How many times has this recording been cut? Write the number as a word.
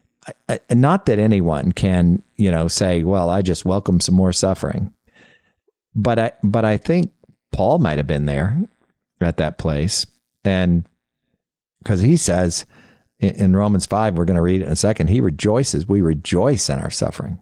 zero